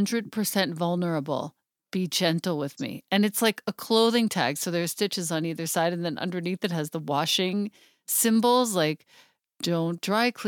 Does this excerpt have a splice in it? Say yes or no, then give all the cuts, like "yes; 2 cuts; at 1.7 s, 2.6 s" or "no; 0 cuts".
no; 0 cuts